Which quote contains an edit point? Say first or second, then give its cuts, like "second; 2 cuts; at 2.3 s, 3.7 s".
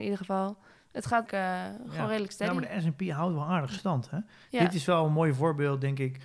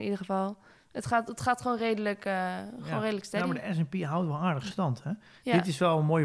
first; 1 cut; at 1.3 s